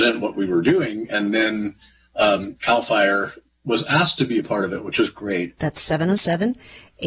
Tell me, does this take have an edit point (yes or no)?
yes